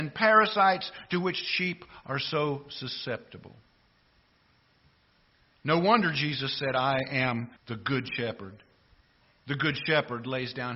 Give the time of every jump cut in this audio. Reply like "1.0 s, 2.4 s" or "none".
7.6 s